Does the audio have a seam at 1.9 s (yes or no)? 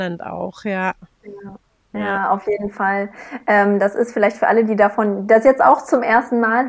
no